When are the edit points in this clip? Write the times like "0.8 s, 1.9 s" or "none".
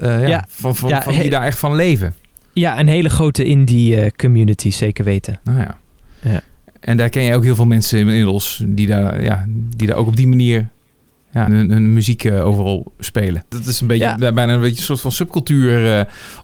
11.5 s, 13.5 s